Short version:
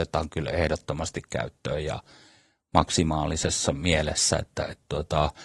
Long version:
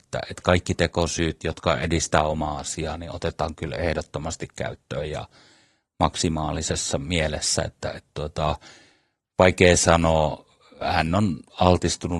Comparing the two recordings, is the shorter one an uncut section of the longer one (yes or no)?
yes